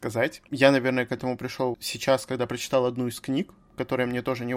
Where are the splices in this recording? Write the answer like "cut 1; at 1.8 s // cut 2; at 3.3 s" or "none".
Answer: cut 1; at 1.7 s

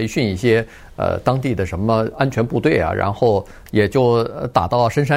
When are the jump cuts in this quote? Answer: cut 1; at 3.7 s

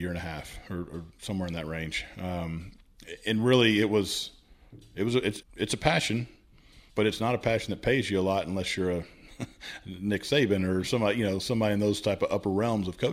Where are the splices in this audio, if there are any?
cut 1; at 5.4 s // cut 2; at 6.9 s

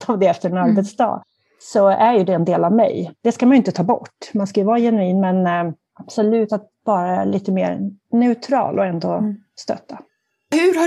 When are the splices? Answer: none

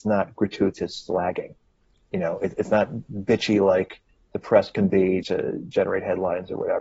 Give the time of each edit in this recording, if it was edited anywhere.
cut 1; at 5.2 s

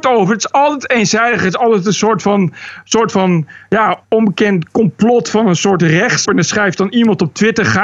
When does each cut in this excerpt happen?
cut 1; at 4.0 s // cut 2; at 6.2 s

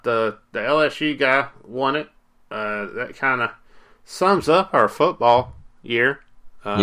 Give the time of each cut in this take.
none

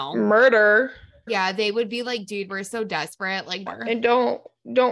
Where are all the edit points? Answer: cut 1; at 1.3 s // cut 2; at 3.7 s

